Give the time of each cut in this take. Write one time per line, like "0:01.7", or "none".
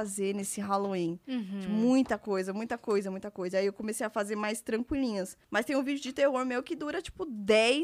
0:05.4